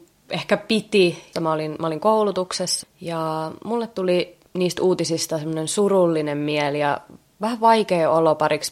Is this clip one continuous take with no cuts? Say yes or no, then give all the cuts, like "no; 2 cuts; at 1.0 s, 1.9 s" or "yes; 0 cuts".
no; 3 cuts; at 1.3 s, 2.8 s, 4.5 s